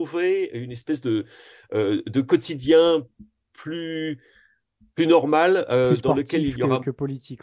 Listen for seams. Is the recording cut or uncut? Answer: uncut